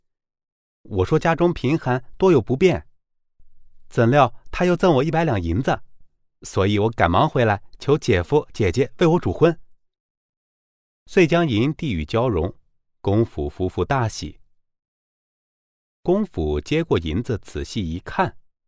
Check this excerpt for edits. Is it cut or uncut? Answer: uncut